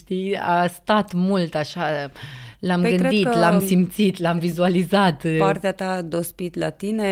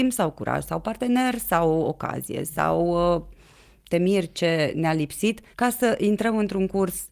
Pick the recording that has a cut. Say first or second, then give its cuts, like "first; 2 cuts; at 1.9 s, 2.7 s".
second; 1 cut; at 5.5 s